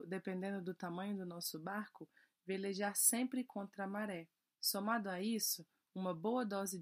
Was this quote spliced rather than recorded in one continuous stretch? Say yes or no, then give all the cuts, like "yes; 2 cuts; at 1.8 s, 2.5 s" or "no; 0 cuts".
yes; 1 cut; at 4.6 s